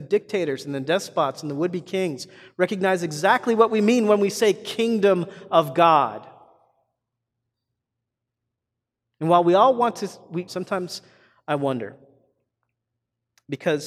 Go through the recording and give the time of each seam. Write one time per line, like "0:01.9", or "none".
0:10.5